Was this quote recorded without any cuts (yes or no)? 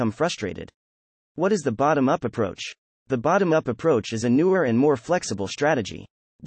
yes